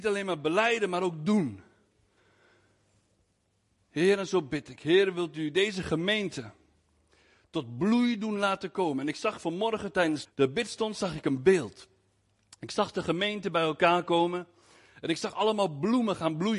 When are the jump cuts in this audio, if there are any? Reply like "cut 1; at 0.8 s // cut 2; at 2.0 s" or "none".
cut 1; at 10.3 s